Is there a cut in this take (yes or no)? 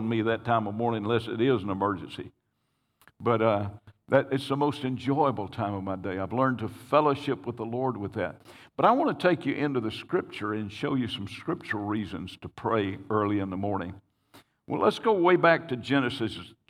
no